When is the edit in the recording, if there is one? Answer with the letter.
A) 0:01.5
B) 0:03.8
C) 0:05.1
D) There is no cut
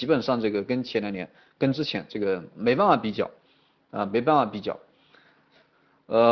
D